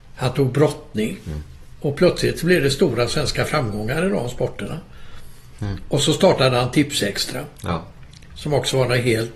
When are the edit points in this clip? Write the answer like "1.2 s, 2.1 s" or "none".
none